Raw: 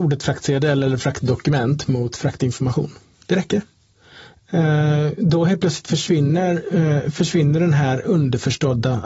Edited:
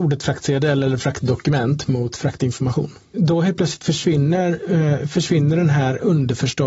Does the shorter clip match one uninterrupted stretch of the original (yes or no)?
no